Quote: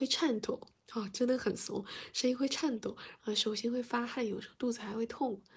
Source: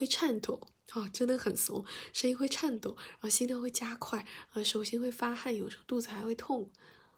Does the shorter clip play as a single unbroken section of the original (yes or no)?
no